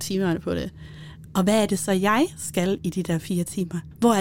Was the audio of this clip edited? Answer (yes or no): yes